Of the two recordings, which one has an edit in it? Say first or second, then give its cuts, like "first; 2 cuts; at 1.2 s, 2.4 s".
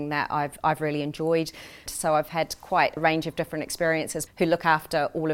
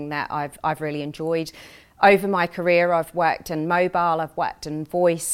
first; 3 cuts; at 1.9 s, 3.0 s, 4.3 s